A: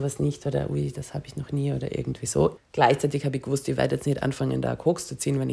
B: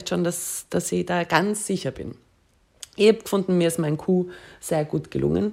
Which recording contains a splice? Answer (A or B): A